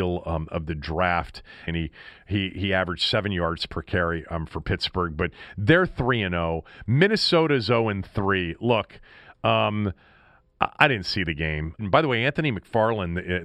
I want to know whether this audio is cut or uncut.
cut